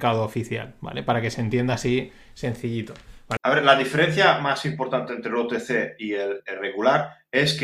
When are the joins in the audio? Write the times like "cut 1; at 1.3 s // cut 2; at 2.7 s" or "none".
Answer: cut 1; at 3.4 s // cut 2; at 6.4 s